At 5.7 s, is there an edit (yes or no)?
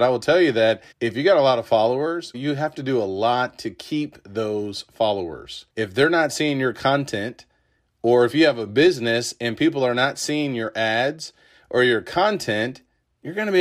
yes